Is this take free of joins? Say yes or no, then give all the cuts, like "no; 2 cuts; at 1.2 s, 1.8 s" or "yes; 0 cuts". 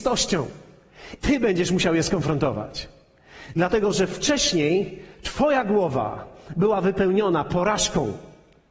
no; 1 cut; at 1.2 s